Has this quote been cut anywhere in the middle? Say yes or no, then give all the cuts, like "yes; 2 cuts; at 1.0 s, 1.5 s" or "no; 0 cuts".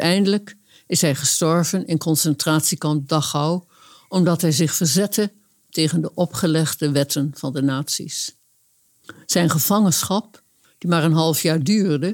no; 0 cuts